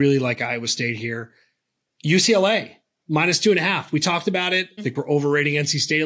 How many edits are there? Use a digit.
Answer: 1